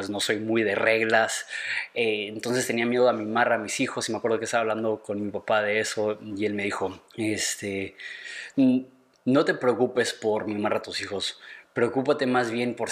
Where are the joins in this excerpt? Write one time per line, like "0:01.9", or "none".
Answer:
0:07.1